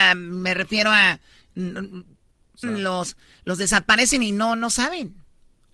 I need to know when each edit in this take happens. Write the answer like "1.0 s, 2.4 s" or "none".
2.6 s